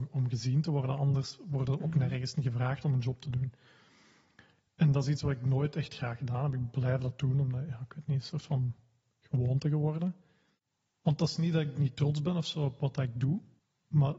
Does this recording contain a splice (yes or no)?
no